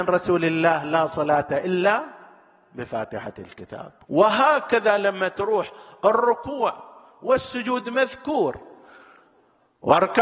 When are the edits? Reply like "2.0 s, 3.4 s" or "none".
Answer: 4.0 s